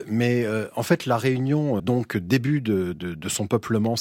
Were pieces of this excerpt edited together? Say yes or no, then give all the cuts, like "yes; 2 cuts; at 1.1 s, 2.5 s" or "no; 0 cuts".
yes; 2 cuts; at 1.8 s, 2.9 s